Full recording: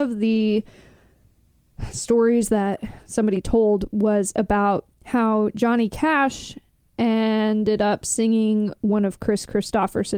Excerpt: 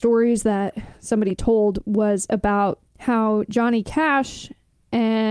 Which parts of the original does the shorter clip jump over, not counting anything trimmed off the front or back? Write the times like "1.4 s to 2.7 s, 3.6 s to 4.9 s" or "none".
none